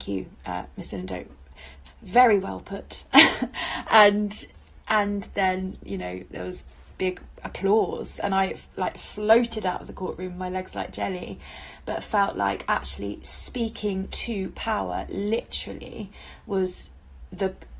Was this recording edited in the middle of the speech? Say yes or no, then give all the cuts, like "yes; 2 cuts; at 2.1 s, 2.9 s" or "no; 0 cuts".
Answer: no; 0 cuts